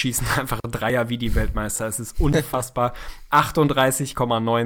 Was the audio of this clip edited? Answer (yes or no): no